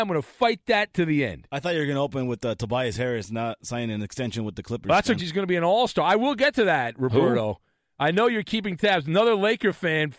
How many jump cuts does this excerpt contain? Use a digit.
1